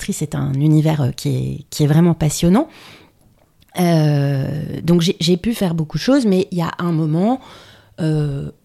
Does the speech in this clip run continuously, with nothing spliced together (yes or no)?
yes